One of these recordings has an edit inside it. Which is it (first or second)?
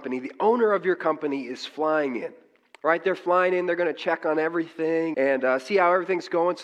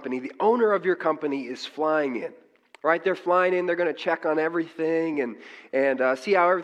first